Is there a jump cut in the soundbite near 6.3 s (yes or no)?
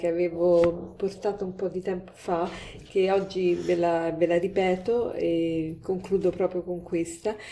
no